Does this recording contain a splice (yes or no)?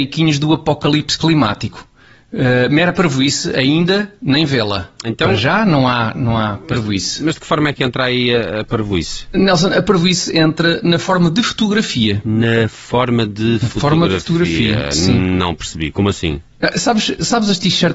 no